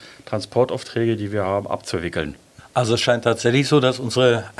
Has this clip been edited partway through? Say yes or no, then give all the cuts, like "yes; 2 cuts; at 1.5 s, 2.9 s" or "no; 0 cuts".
yes; 1 cut; at 2.6 s